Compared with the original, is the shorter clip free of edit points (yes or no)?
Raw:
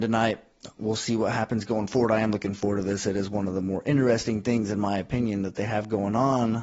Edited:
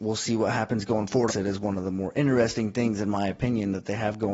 no